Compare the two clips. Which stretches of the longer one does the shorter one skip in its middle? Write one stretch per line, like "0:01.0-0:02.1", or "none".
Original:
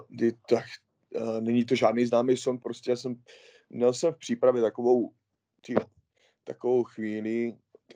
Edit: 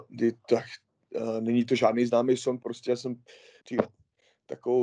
0:03.6-0:05.6